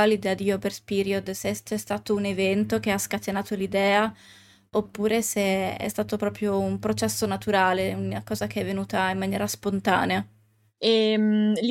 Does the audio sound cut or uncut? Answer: cut